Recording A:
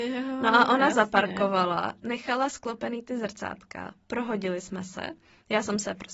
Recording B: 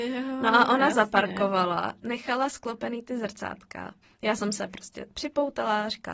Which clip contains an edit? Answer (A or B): B